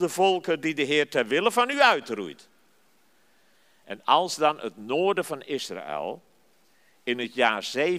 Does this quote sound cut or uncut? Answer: uncut